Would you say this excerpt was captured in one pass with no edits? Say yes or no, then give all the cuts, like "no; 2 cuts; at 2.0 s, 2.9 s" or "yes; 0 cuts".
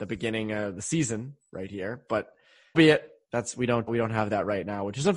no; 2 cuts; at 2.7 s, 3.9 s